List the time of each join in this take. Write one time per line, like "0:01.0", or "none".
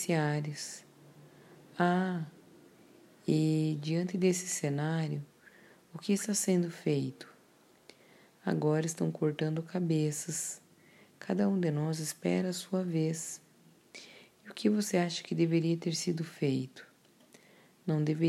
none